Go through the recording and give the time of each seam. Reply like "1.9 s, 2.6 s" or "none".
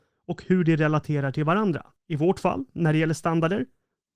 2.0 s